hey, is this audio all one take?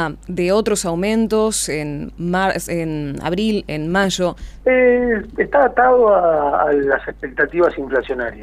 no; 1 cut; at 4.6 s

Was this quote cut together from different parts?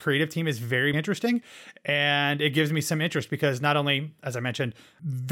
yes; 1 cut; at 0.9 s

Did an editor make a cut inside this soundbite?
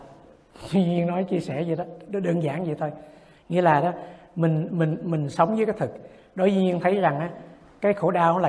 no; 0 cuts

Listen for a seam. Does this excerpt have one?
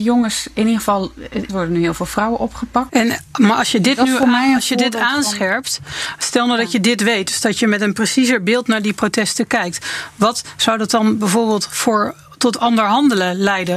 yes; 2 cuts; at 1.5 s, 2.9 s

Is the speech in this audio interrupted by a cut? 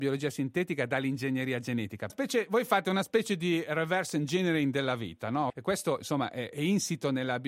yes; 3 cuts; at 2.1 s, 5.5 s, 6.5 s

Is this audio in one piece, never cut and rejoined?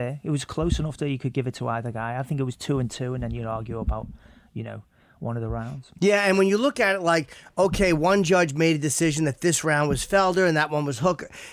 yes; 0 cuts

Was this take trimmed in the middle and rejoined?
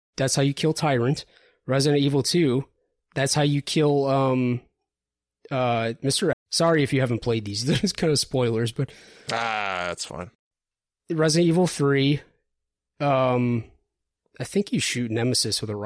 yes; 1 cut; at 6.3 s

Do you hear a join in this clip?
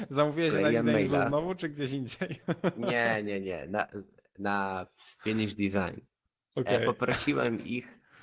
yes; 1 cut; at 6.1 s

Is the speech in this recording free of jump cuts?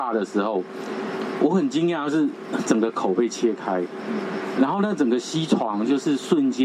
no; 1 cut; at 2.6 s

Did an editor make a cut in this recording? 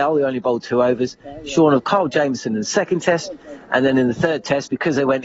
no; 0 cuts

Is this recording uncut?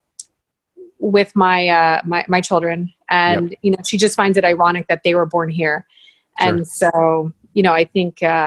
yes; 0 cuts

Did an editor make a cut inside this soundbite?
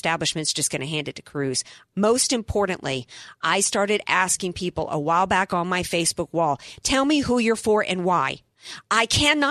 yes; 1 cut; at 1.9 s

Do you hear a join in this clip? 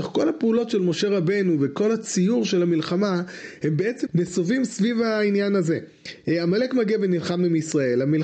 yes; 1 cut; at 4.1 s

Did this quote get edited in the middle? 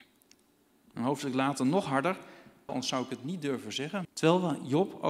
yes; 2 cuts; at 2.7 s, 4.0 s

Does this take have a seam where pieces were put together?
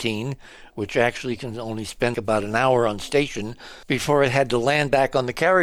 yes; 2 cuts; at 2.1 s, 3.8 s

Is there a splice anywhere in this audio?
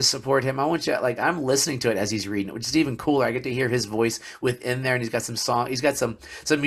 no; 0 cuts

